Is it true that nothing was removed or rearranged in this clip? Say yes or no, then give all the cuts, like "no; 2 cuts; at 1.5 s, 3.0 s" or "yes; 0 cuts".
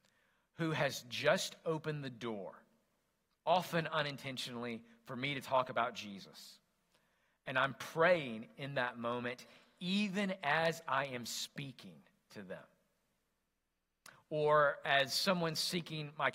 yes; 0 cuts